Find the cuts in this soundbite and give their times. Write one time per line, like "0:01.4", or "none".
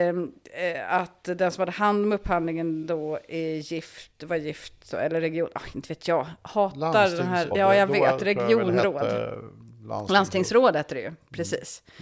0:04.9
0:07.5